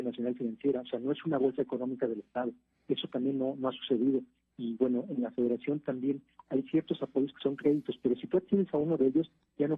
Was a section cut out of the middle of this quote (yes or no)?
no